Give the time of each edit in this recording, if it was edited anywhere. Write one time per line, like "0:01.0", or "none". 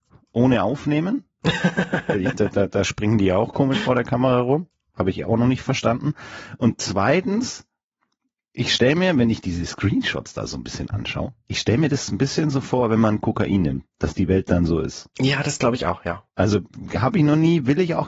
0:11.4